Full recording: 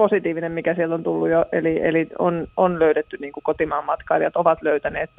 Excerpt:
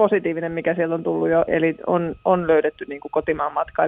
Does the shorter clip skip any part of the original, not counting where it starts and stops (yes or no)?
yes